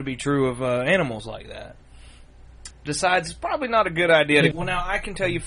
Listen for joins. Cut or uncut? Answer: cut